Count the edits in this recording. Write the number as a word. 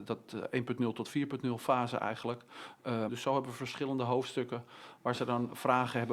one